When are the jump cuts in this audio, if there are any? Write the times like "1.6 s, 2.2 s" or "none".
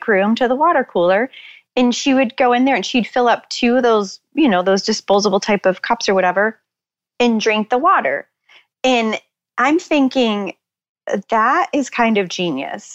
none